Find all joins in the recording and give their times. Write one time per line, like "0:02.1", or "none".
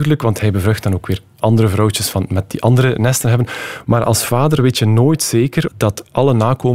0:03.8
0:05.7